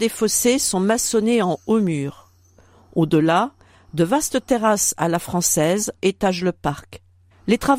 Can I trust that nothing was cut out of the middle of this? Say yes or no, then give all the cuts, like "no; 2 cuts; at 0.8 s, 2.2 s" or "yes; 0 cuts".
no; 1 cut; at 6.0 s